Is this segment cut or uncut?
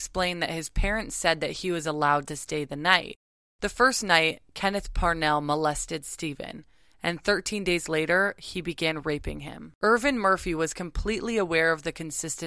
cut